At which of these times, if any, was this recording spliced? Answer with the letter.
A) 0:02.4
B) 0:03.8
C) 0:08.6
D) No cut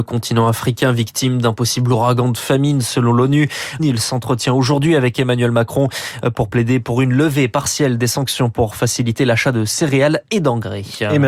B